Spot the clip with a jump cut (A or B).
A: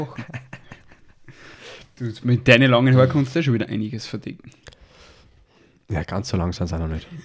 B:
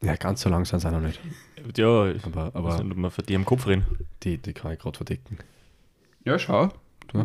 B